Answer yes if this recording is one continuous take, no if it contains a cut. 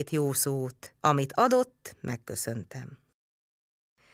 no